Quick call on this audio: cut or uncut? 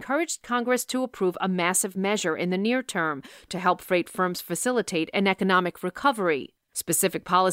uncut